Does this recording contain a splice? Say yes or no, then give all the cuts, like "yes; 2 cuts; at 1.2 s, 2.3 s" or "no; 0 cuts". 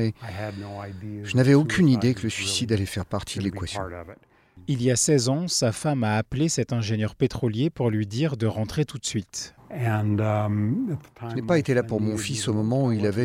yes; 1 cut; at 9.6 s